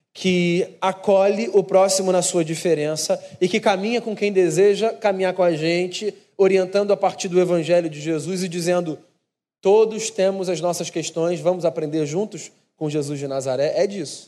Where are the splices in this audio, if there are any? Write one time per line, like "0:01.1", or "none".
none